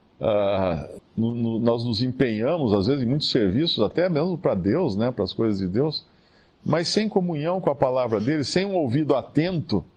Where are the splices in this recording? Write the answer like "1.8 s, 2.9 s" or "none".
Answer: 1.0 s